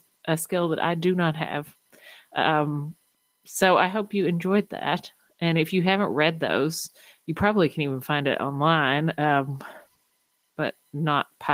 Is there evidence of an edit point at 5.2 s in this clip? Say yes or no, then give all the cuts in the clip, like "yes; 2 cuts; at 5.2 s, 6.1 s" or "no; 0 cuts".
no; 0 cuts